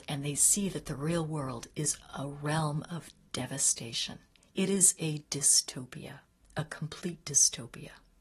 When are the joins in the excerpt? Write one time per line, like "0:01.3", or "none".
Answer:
none